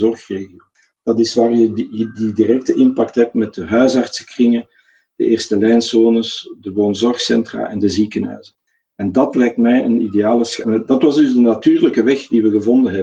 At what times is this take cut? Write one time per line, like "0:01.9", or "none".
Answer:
none